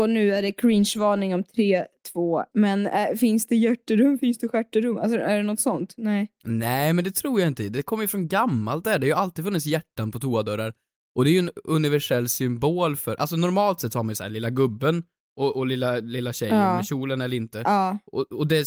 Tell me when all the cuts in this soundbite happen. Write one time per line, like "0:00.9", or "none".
0:02.5